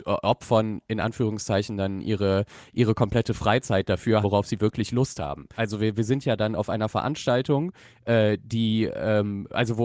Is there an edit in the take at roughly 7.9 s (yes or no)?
no